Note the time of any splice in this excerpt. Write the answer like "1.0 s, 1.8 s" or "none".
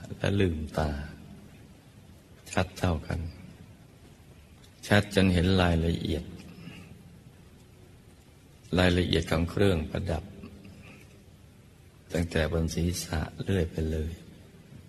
none